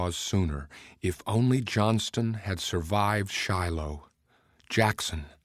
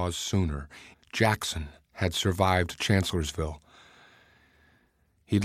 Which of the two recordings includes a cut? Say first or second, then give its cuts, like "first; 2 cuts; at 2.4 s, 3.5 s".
second; 1 cut; at 0.9 s